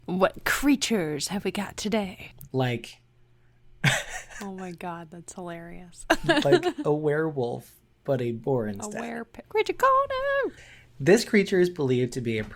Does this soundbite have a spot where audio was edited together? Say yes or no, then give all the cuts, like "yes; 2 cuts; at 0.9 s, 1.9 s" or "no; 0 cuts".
yes; 3 cuts; at 2.5 s, 9.4 s, 10.6 s